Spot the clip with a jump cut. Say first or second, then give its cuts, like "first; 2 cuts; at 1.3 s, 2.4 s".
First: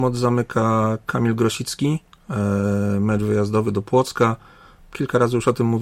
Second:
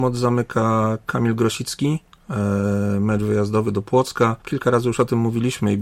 second; 1 cut; at 4.4 s